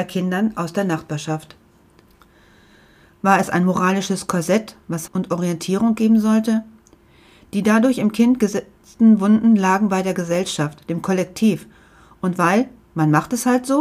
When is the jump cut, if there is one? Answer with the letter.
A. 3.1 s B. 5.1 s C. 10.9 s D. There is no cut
B